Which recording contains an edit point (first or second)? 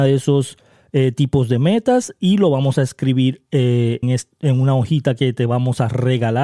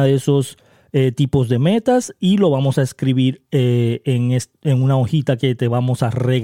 first